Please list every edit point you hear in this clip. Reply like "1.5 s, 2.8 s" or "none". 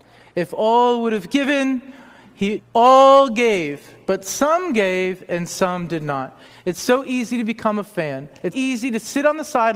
2.6 s, 6.5 s, 8.5 s